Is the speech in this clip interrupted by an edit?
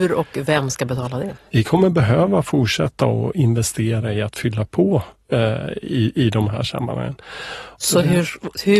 yes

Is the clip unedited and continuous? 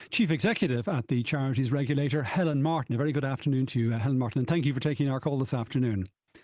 yes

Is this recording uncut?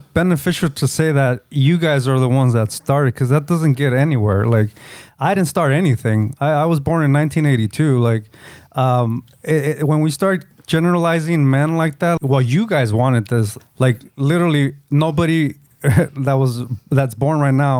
no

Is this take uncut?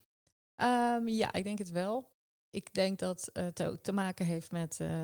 yes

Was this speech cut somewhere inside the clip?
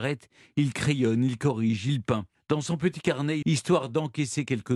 yes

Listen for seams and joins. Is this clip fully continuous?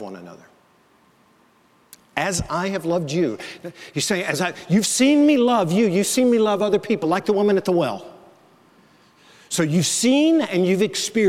yes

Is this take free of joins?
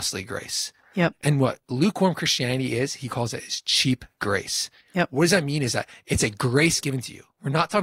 yes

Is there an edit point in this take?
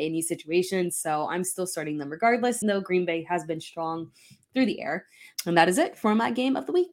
yes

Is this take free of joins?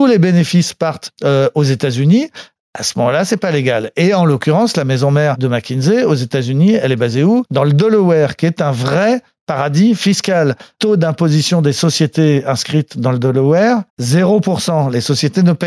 no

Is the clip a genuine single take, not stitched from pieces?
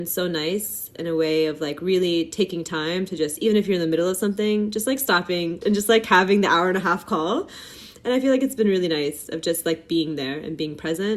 no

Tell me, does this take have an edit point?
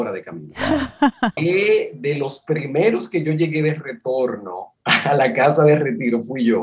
yes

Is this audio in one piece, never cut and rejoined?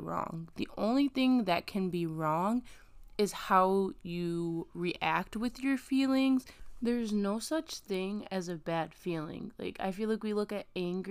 yes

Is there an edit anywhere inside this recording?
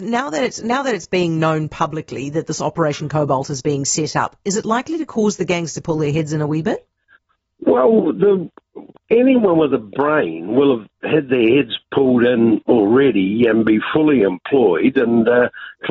no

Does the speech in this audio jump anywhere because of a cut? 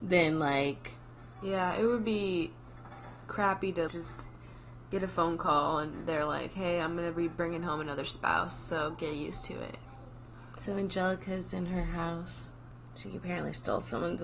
yes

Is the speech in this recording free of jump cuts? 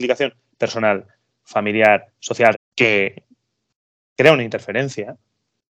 no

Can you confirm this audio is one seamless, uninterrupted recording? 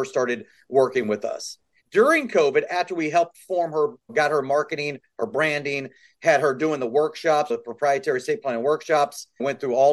no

